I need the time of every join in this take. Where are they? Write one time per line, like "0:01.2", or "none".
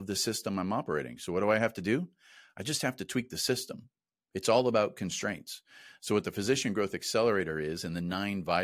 none